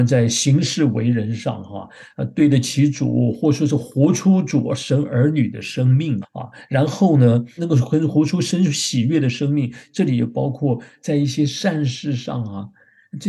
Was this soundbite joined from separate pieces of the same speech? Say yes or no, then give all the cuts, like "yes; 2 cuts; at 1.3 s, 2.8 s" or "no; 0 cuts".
yes; 2 cuts; at 6.2 s, 7.6 s